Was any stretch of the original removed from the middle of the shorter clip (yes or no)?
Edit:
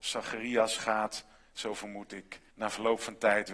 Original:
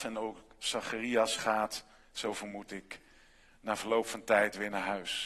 yes